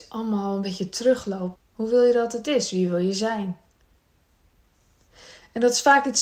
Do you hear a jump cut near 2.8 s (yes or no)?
no